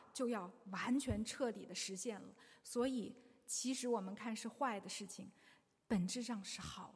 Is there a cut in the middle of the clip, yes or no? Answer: no